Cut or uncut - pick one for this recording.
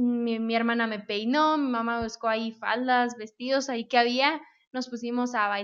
uncut